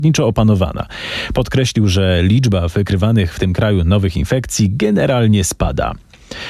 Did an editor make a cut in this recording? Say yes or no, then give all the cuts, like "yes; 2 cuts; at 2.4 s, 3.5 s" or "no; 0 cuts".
no; 0 cuts